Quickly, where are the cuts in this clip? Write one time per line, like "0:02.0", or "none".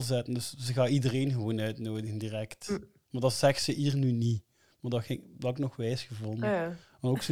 none